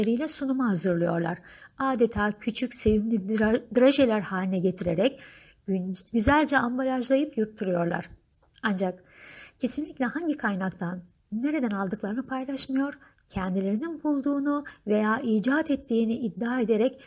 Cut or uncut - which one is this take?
uncut